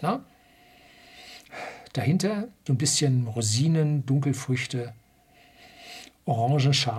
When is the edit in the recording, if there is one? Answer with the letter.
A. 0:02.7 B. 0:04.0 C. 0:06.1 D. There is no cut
A